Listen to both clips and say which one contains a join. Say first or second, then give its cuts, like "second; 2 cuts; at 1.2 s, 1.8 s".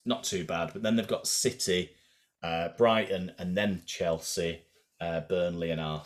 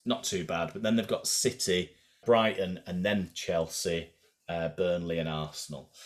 second; 1 cut; at 2.2 s